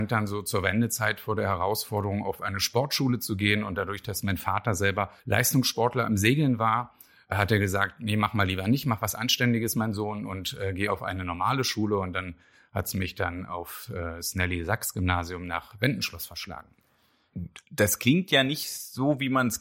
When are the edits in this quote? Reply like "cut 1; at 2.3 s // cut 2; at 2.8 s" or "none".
cut 1; at 5.2 s

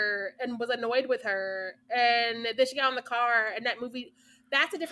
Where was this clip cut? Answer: none

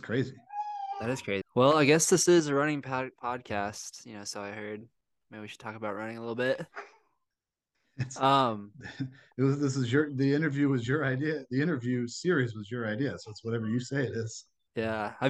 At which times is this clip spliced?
cut 1; at 1.4 s

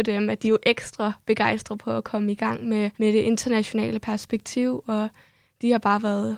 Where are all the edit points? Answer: cut 1; at 2.9 s

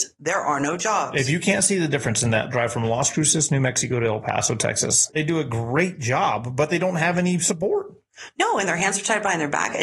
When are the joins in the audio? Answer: cut 1; at 5.1 s

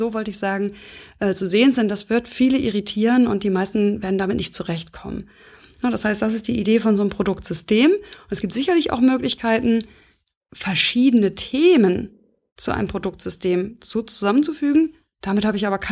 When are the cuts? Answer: none

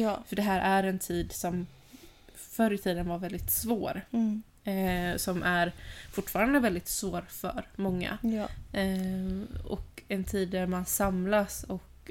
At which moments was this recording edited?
none

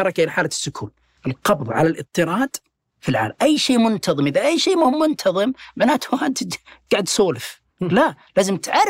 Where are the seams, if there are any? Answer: cut 1; at 1.2 s // cut 2; at 7.7 s

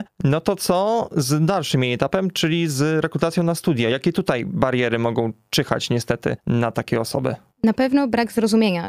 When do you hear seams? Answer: none

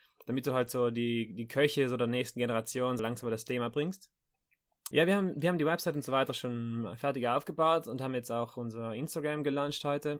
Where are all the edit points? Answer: cut 1; at 3.0 s // cut 2; at 4.9 s

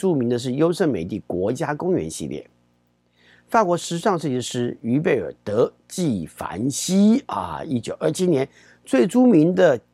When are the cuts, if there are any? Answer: none

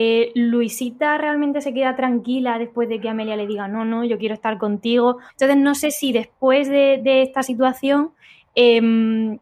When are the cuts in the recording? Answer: cut 1; at 5.3 s

